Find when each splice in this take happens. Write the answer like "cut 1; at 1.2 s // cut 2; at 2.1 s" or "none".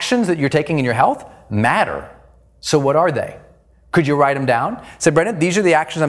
none